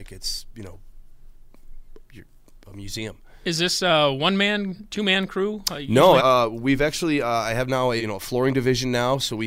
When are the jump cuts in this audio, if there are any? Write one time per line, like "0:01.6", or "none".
0:06.2
0:08.0